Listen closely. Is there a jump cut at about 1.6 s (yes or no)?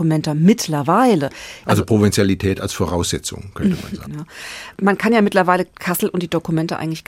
yes